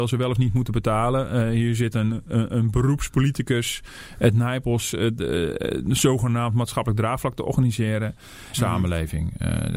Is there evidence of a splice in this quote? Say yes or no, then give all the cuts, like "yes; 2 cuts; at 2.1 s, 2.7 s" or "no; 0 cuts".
yes; 1 cut; at 8.5 s